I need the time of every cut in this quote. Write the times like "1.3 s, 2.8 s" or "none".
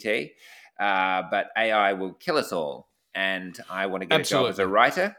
none